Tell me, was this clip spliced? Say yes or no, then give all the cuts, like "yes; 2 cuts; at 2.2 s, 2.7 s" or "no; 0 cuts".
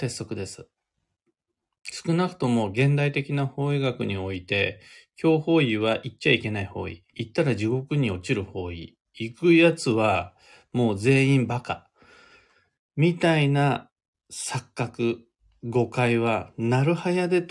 yes; 1 cut; at 7.1 s